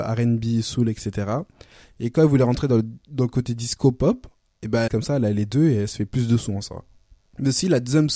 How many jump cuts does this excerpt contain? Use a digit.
1